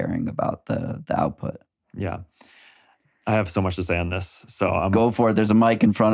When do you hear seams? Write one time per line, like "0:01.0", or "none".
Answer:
none